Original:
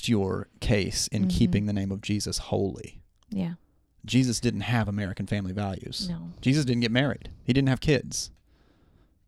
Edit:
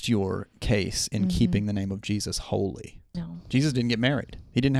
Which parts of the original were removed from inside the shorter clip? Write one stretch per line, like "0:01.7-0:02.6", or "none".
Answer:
0:03.1-0:06.1